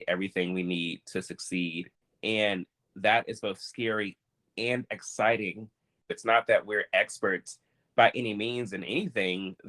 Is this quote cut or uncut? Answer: cut